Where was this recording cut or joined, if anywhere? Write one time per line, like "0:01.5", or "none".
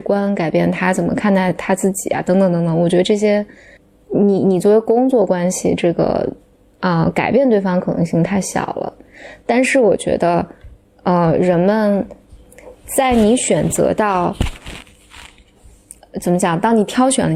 none